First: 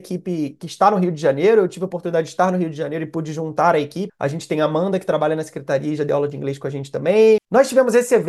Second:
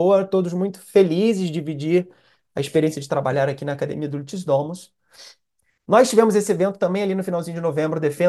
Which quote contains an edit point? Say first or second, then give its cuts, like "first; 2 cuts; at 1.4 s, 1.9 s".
first; 2 cuts; at 4.1 s, 7.4 s